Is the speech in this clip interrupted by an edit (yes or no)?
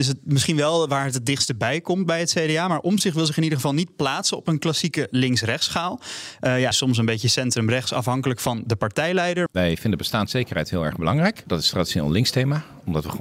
yes